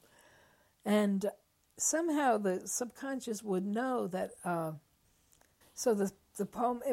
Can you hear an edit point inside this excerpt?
yes; 1 cut; at 5.6 s

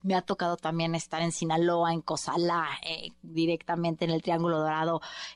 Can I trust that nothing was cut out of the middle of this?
yes; 0 cuts

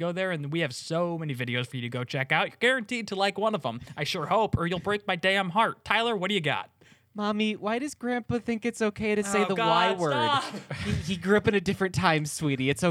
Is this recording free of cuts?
yes; 0 cuts

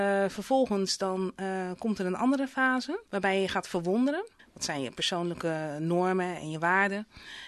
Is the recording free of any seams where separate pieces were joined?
no; 2 cuts; at 3.1 s, 4.4 s

